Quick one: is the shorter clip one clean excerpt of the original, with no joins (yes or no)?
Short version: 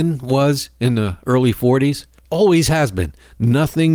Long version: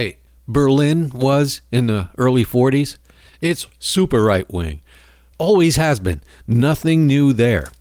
no